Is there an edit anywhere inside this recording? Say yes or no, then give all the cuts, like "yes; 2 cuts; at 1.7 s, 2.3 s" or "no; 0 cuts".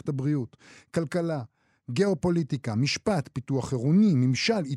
no; 0 cuts